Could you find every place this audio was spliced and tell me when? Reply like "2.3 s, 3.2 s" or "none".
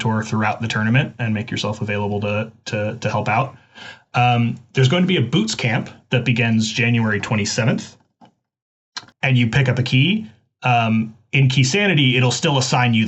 9.1 s

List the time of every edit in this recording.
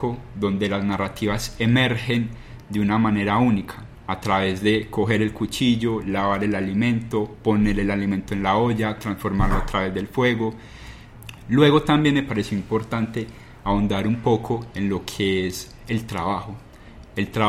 none

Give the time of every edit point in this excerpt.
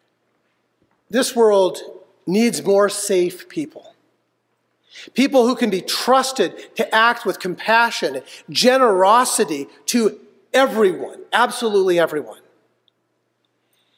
none

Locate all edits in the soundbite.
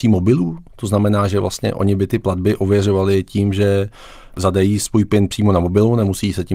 none

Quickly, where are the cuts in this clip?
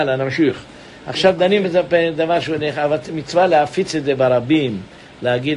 none

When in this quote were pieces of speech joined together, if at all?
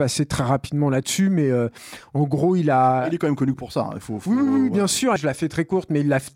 5.2 s

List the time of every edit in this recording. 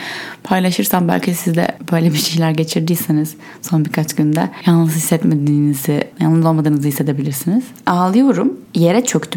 none

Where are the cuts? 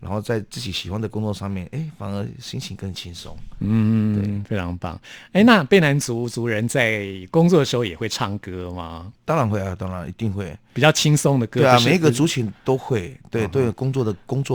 none

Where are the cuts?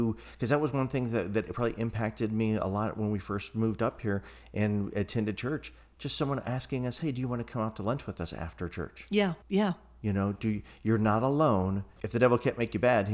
9.4 s, 12.0 s

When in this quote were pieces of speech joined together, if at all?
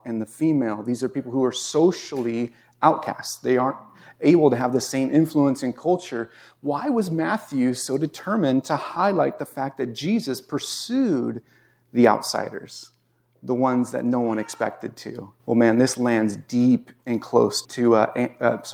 15.4 s, 17.6 s

